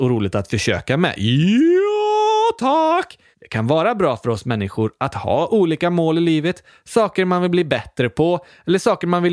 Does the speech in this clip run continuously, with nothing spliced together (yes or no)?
yes